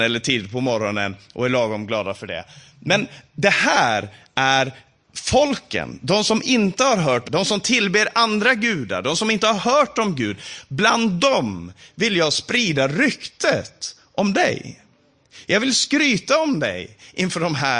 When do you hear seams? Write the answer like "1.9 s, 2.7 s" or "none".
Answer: 7.2 s